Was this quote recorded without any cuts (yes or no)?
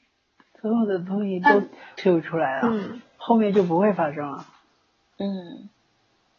yes